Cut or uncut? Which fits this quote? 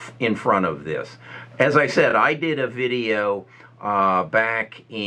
uncut